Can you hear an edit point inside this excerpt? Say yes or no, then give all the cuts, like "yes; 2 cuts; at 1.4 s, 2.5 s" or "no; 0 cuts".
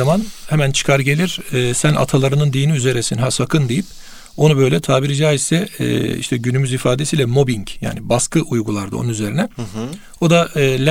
no; 0 cuts